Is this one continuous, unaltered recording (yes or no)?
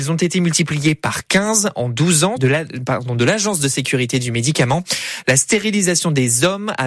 no